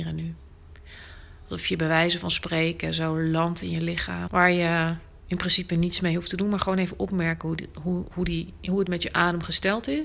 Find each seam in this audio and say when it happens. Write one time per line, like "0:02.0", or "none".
0:04.3
0:08.1